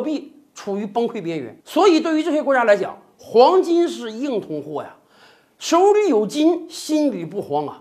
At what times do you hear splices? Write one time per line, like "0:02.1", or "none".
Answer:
0:01.6